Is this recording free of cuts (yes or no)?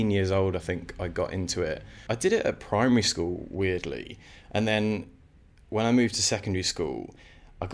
yes